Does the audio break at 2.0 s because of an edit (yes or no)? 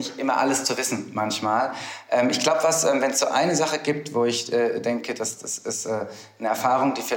no